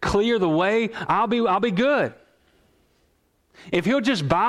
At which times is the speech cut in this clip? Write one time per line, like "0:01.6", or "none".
none